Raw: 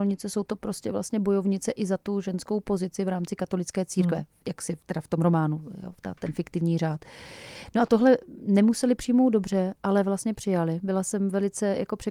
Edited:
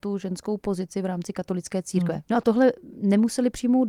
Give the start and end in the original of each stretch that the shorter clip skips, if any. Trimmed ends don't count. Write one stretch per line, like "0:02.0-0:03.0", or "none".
0:04.3-0:07.7